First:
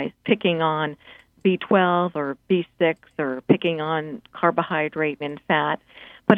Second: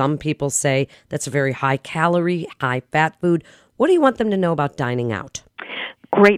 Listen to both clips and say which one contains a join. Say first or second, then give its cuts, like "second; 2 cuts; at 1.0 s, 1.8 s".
first; 1 cut; at 5.2 s